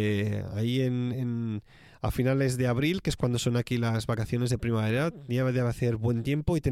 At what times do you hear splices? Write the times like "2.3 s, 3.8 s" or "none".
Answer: none